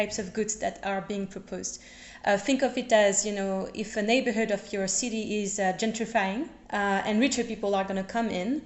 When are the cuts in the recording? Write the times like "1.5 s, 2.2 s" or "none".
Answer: 6.6 s